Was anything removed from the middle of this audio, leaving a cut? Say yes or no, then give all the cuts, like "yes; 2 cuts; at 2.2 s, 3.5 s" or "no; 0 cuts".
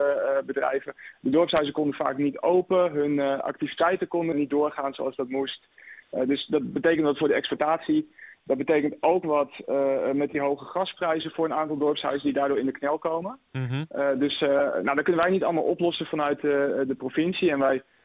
yes; 1 cut; at 4.3 s